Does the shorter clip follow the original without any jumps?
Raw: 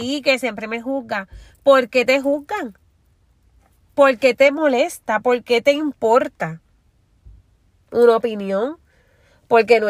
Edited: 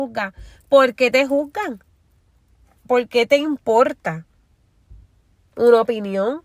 no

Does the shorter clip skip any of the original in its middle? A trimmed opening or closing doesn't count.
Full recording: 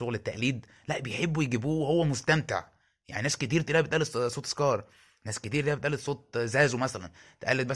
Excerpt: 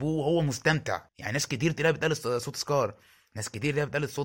yes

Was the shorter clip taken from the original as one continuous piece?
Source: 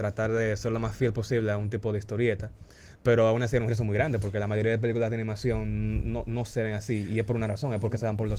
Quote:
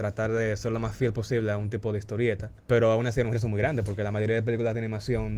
no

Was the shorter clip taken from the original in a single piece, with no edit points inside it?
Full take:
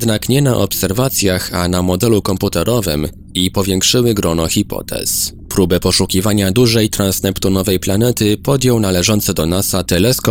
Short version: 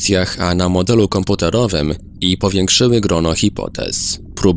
yes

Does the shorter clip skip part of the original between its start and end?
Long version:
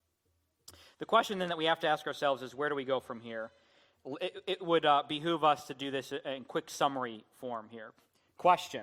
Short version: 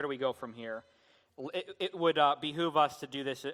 no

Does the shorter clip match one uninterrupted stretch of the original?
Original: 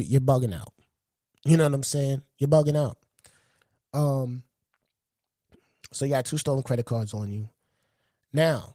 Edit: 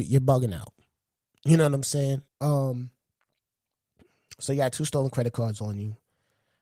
no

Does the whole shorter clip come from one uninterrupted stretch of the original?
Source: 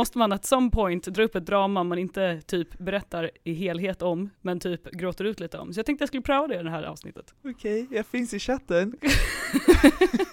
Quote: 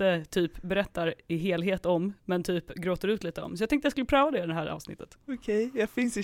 yes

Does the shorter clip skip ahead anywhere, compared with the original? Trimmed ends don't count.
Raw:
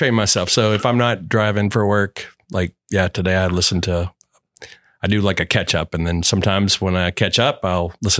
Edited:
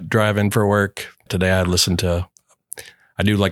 yes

